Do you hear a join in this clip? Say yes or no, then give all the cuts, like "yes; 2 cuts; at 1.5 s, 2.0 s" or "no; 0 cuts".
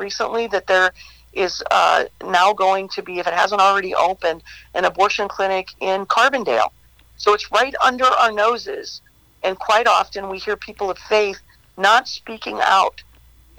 no; 0 cuts